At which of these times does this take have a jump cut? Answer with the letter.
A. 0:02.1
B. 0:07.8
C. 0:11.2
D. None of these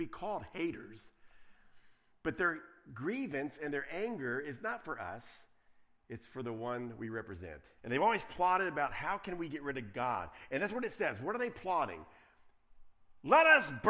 B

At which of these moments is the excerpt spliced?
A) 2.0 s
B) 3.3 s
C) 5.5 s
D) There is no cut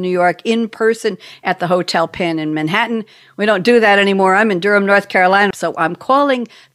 C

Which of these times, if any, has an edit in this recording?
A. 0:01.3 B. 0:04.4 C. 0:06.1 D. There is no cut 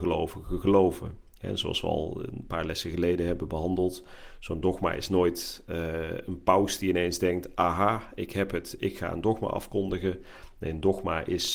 D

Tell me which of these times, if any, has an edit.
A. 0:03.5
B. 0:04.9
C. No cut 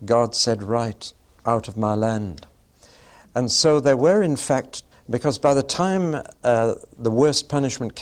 B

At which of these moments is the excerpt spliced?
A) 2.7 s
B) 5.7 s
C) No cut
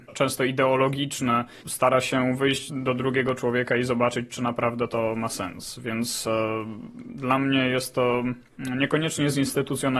A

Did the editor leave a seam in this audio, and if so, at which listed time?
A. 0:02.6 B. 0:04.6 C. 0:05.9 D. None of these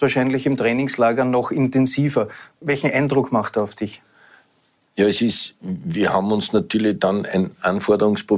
A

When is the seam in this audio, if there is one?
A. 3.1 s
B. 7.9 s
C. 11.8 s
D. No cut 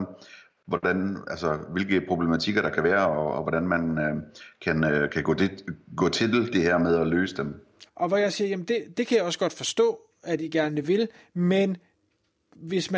B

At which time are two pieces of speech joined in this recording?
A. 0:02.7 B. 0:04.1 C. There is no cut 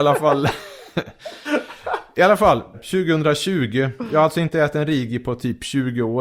A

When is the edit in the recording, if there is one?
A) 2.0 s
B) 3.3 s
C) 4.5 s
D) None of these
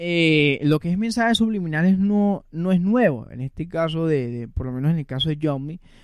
D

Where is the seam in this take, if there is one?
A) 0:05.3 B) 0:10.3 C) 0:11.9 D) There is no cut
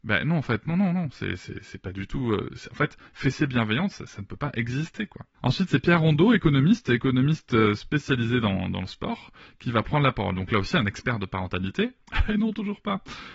A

